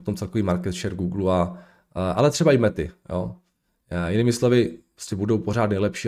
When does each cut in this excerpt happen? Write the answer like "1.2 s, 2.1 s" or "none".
none